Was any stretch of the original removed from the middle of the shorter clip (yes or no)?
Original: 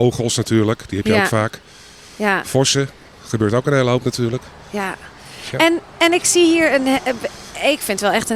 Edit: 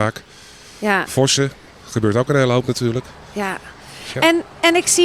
no